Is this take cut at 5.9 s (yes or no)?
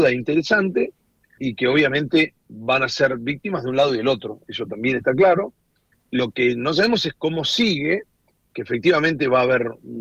yes